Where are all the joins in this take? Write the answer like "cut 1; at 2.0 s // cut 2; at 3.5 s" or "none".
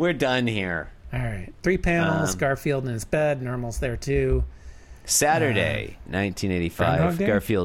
cut 1; at 6.1 s